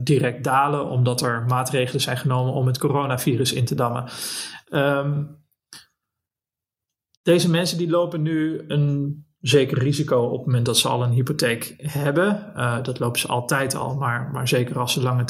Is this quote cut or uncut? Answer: uncut